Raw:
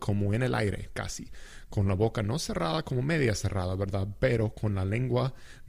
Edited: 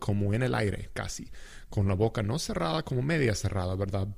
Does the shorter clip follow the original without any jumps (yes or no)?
yes